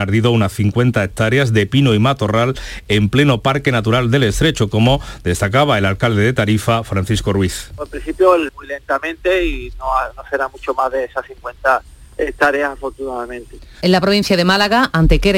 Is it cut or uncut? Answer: cut